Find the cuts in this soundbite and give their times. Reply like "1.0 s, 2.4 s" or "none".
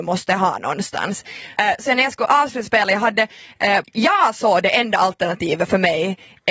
1.6 s, 3.8 s